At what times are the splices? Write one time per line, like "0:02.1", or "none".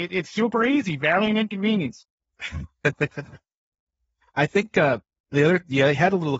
none